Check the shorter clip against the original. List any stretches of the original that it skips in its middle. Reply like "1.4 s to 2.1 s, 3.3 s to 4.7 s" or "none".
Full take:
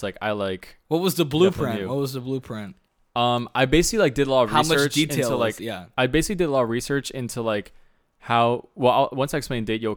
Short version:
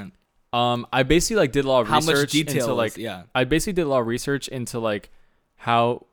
none